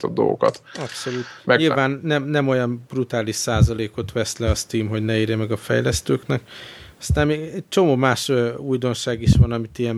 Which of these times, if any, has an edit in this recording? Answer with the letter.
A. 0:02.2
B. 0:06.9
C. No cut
C